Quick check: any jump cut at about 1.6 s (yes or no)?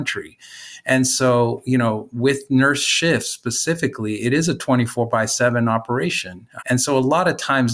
no